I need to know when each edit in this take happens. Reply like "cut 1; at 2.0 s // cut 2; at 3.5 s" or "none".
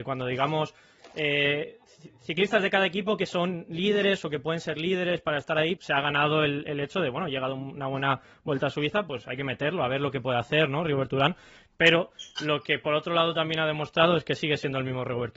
cut 1; at 5.8 s